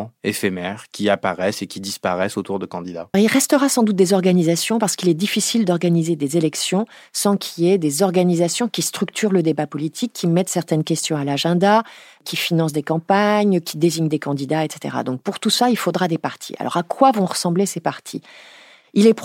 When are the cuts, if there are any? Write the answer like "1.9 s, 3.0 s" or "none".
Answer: 3.1 s